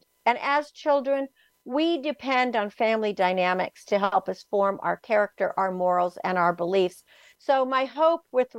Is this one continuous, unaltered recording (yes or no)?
yes